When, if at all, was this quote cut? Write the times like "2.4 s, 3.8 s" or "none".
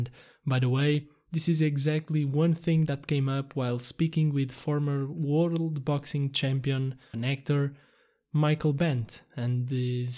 7.1 s

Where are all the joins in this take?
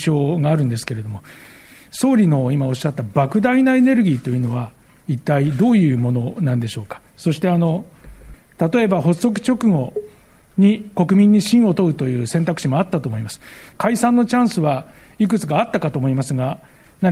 none

